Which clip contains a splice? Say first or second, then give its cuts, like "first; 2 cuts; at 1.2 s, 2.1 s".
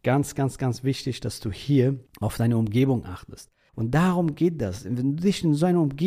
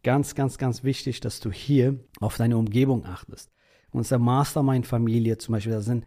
first; 1 cut; at 3.7 s